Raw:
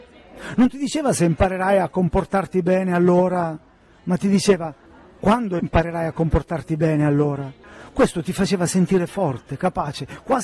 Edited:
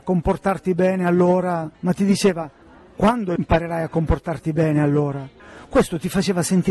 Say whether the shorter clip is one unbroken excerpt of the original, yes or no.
no